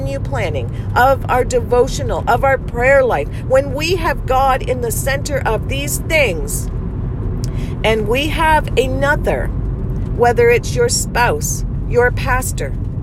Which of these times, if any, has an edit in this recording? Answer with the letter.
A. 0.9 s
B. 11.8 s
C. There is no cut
C